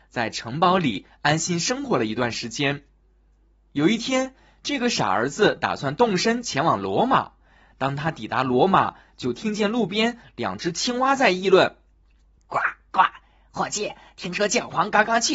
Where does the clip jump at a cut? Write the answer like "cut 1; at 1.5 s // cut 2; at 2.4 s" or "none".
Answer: none